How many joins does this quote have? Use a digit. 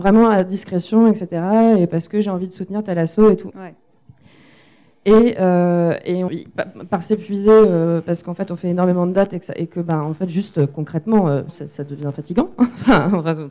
3